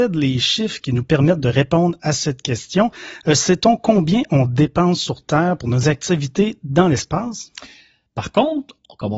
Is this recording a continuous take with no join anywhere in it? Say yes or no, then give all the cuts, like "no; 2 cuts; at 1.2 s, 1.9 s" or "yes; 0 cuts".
no; 1 cut; at 8.1 s